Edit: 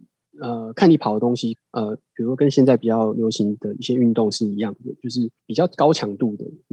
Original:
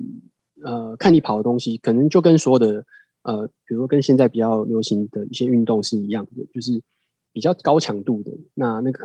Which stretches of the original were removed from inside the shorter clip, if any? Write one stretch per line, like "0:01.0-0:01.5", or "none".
0:01.8-0:03.1
0:06.9-0:07.3